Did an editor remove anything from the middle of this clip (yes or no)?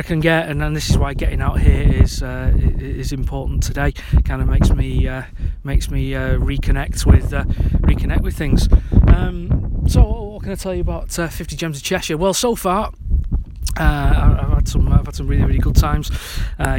no